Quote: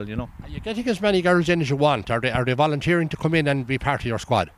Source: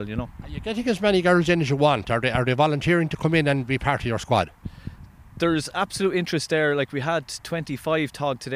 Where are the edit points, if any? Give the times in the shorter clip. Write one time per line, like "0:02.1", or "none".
none

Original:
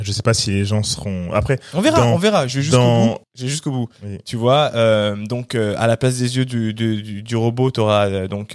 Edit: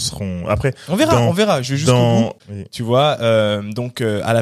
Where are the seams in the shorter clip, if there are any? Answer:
0:02.4

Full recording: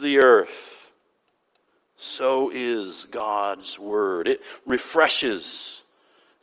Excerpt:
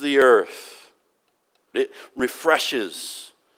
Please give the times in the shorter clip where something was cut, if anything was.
0:01.7

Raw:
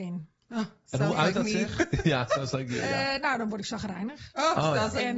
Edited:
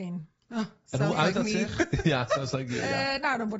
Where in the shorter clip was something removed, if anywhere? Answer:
none

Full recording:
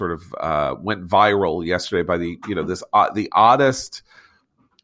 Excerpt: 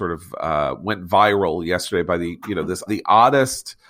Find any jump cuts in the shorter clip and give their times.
0:02.9

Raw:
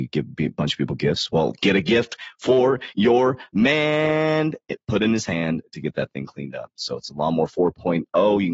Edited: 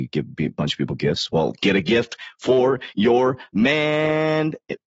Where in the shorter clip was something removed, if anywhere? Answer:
none

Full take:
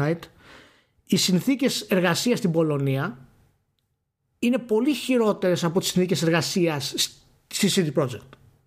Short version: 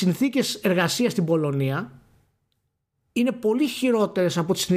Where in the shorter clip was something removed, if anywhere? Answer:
none

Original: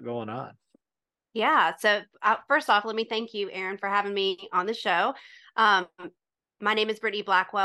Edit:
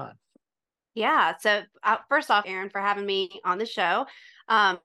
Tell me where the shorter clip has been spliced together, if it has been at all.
0:02.4

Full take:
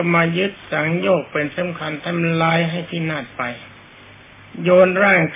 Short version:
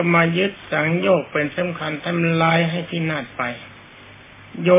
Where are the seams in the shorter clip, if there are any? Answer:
none

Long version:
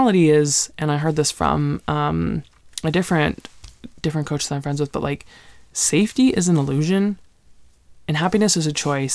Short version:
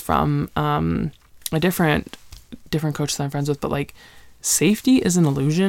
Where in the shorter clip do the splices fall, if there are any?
none

